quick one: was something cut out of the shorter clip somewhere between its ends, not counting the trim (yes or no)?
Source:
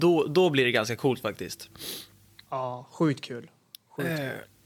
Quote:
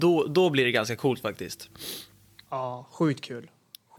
no